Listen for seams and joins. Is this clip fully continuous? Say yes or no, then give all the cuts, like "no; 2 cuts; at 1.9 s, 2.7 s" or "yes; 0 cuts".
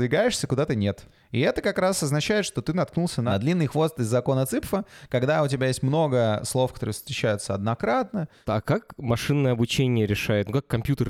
yes; 0 cuts